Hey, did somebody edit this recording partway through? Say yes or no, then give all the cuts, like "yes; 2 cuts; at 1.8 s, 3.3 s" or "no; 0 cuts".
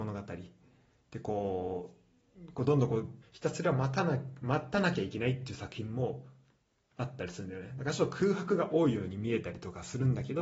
yes; 1 cut; at 3.2 s